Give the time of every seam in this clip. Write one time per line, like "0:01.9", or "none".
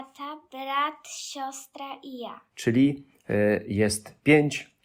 0:02.5